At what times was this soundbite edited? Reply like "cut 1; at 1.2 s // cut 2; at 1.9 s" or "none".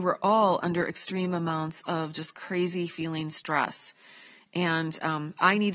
none